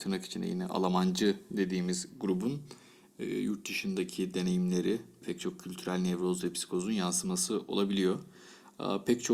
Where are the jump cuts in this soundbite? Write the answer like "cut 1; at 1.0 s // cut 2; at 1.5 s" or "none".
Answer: cut 1; at 5.2 s